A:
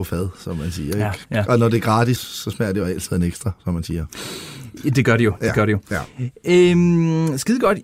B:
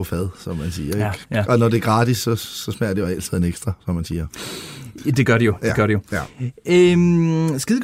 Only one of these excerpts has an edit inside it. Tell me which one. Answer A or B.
A